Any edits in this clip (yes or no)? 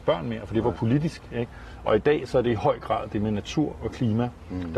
no